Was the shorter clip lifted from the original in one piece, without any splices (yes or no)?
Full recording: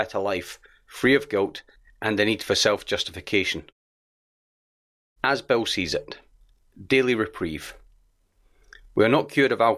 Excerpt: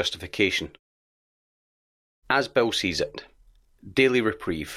yes